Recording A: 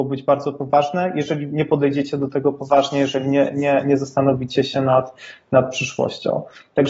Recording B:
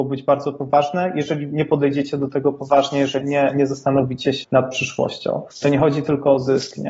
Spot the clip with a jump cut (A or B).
B